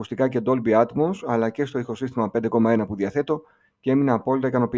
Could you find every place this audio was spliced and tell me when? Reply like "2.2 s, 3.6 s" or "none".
none